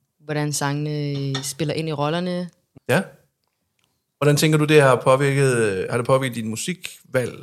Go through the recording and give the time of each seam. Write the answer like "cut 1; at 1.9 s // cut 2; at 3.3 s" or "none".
cut 1; at 2.7 s